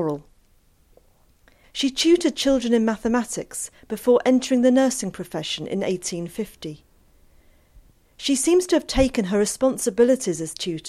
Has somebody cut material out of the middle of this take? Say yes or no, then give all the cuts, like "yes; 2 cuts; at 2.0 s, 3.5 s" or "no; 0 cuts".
yes; 1 cut; at 1.6 s